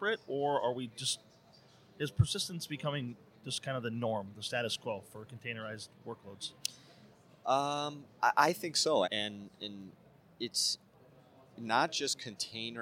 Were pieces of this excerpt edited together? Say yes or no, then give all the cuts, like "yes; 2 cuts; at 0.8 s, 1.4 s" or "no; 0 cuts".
yes; 1 cut; at 9.0 s